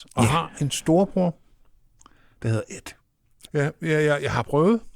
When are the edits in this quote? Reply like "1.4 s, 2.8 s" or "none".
3.5 s